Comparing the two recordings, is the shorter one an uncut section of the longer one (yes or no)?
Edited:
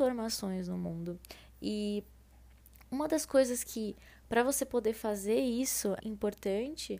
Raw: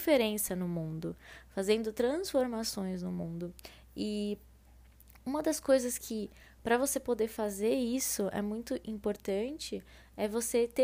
no